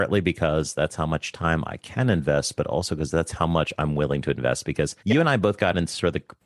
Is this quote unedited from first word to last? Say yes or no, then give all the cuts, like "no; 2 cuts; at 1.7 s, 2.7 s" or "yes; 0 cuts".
no; 1 cut; at 5.0 s